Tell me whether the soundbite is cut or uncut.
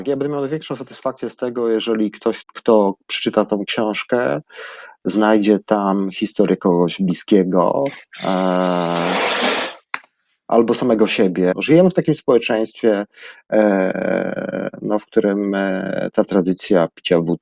cut